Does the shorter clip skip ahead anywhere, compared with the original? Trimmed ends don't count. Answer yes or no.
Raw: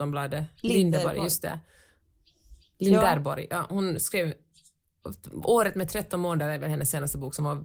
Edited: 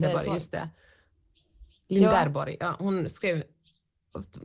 no